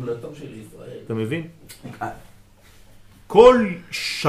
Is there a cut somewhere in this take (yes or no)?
no